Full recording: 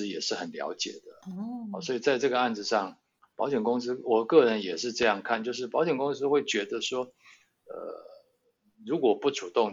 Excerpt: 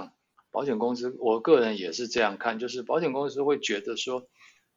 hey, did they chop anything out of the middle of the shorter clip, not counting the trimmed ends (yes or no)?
no